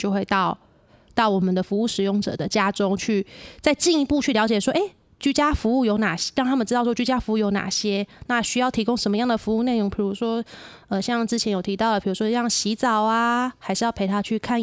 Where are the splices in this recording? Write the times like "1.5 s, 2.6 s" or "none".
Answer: none

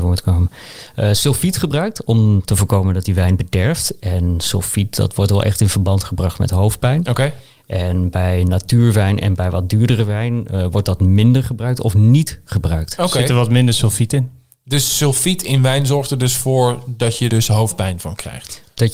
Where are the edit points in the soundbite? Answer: 17.3 s

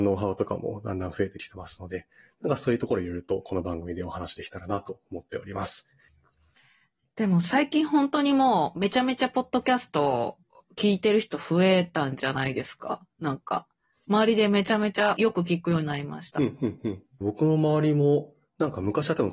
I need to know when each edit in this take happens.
6.1 s, 15.2 s, 17.2 s

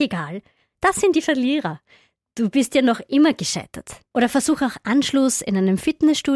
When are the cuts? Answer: 2.2 s, 4.1 s

